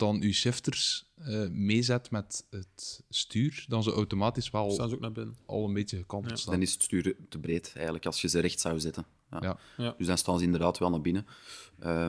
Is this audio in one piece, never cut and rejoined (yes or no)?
yes